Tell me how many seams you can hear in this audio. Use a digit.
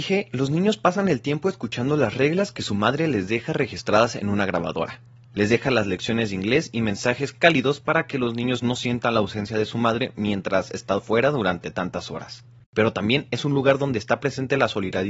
1